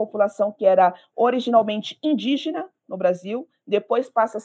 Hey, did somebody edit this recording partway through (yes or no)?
no